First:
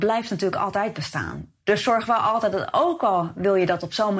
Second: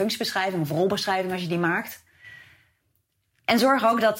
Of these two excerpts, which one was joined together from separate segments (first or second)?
first